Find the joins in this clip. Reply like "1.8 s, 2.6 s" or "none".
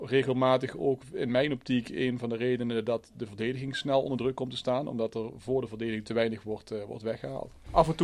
none